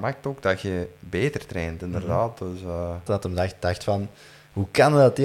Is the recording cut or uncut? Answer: cut